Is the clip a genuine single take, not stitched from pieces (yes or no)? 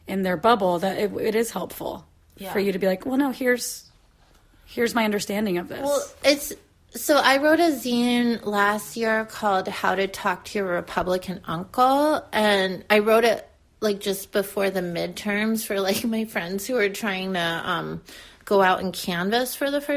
yes